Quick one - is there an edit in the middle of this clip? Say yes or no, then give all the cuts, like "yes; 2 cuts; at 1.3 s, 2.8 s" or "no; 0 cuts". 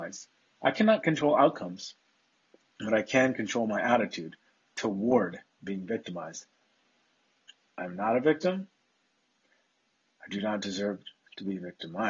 no; 0 cuts